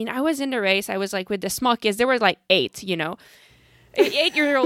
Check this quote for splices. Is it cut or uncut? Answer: uncut